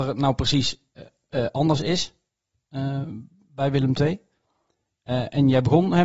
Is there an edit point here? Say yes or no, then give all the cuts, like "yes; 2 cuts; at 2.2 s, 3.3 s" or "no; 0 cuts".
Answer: no; 0 cuts